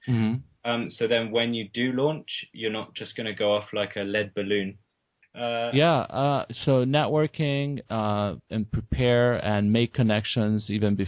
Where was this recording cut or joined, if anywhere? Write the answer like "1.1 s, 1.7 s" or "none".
5.2 s

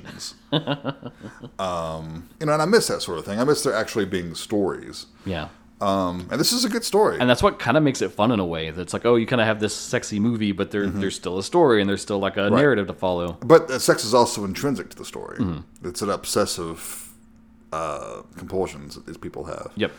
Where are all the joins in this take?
2.4 s

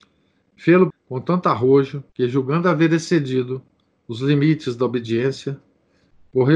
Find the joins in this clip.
0.9 s, 2.1 s

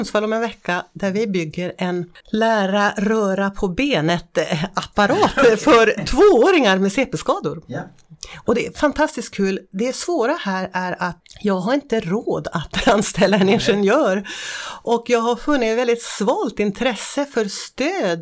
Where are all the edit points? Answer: 2.2 s

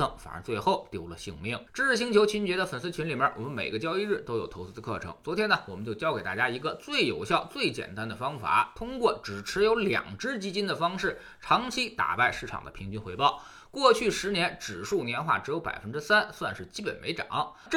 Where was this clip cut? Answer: 1.7 s

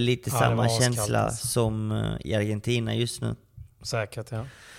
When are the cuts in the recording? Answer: 3.7 s

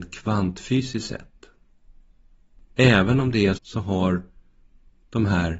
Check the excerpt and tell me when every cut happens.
3.6 s

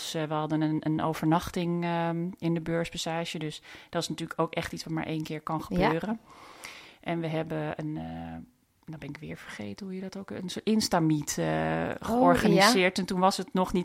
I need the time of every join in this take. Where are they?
none

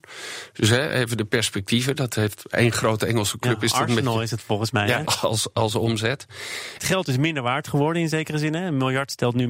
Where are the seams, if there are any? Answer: 5.0 s, 6.8 s

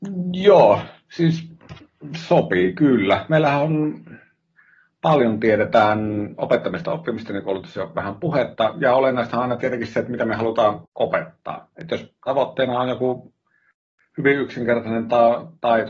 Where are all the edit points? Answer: 10.9 s

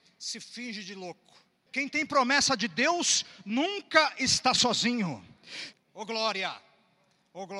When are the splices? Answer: 1.7 s, 5.7 s

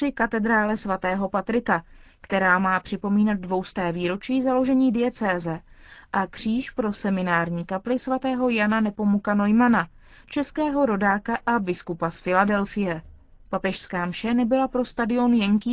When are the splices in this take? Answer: none

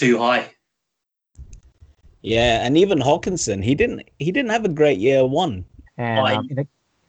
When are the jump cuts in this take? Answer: 5.9 s

